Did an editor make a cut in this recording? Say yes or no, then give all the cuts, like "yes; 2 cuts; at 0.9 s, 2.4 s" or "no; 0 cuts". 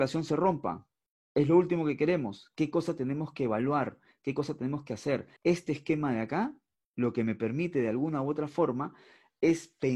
yes; 1 cut; at 5.4 s